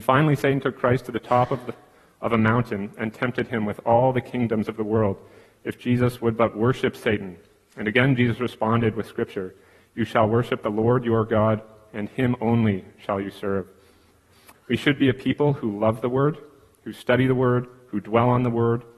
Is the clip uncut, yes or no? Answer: no